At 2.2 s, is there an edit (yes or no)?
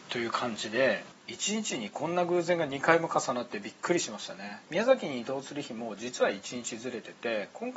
no